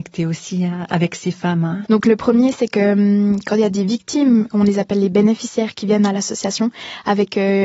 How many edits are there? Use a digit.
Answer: 1